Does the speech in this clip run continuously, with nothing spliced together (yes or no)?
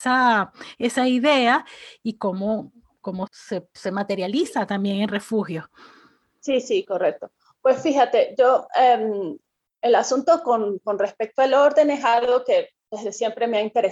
no